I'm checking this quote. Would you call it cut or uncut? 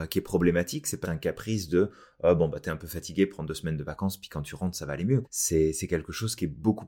cut